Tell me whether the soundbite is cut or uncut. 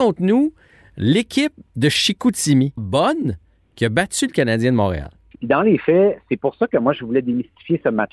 cut